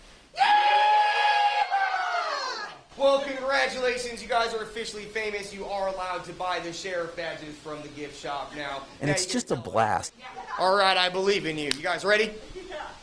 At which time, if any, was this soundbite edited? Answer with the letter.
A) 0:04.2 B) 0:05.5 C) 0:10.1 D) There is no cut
C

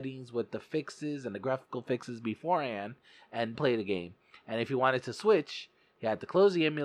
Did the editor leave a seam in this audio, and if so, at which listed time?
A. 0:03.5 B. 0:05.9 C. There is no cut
A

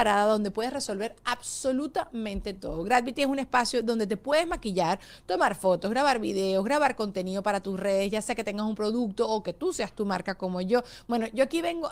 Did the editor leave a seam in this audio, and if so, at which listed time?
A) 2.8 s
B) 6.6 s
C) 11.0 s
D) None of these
D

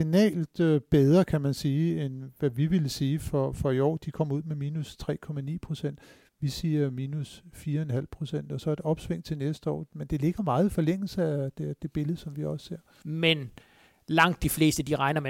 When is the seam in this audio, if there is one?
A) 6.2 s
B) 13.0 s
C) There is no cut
B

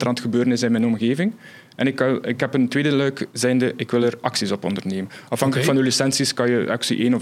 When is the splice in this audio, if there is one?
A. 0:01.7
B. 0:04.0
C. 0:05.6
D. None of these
D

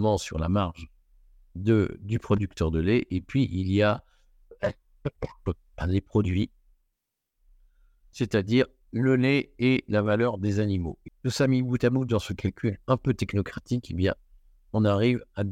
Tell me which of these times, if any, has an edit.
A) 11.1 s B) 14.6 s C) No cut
A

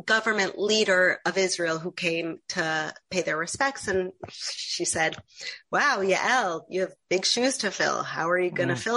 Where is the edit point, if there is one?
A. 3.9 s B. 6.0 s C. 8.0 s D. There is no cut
D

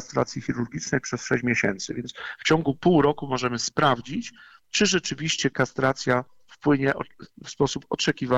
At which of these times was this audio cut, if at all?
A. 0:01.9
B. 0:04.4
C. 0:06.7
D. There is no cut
D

